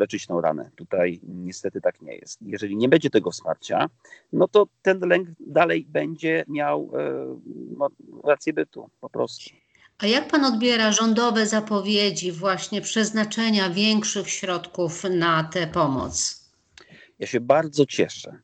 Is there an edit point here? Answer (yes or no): no